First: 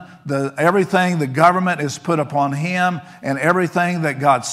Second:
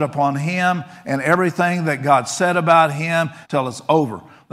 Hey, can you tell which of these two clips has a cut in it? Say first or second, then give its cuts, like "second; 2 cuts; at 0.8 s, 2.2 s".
second; 1 cut; at 3.4 s